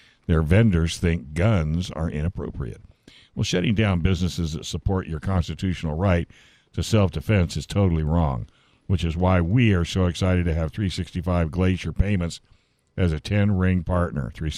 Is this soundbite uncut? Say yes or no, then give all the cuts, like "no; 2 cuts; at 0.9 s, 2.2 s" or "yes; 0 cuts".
yes; 0 cuts